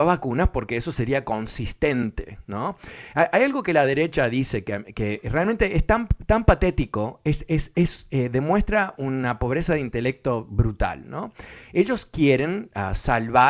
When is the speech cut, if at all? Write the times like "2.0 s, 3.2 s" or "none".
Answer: none